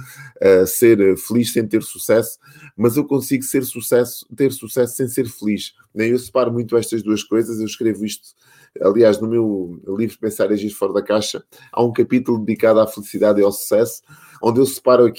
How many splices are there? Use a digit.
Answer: 0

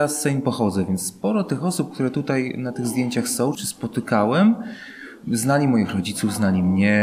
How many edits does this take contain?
1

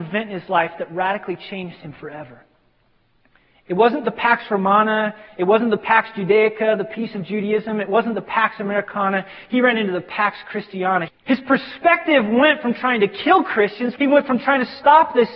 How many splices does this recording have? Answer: 2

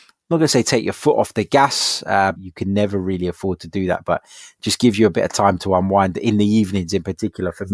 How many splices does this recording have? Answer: 1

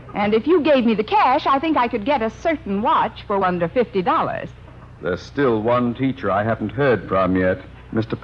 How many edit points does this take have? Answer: 2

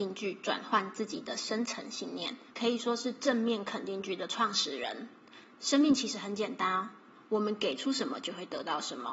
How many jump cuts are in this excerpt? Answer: 1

